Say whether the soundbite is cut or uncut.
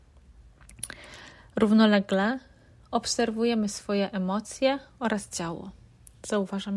uncut